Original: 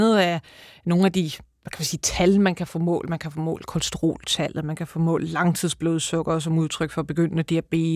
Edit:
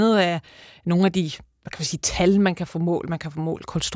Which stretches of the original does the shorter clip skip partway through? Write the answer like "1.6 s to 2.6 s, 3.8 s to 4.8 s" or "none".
none